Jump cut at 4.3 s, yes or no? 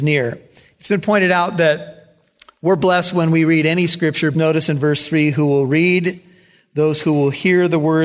yes